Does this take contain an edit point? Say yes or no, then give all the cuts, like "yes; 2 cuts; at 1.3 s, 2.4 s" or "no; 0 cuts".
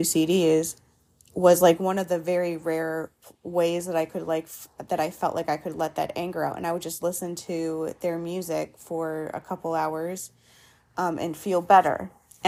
no; 0 cuts